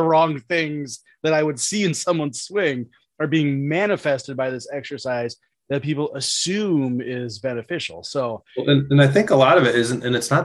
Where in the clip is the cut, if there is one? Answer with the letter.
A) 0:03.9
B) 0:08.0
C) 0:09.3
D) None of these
D